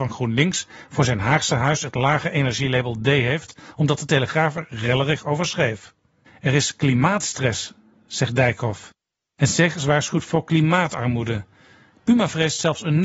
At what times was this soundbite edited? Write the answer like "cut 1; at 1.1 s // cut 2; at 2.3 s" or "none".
cut 1; at 6.3 s